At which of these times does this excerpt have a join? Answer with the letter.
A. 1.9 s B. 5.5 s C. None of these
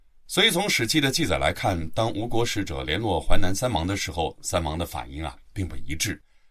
C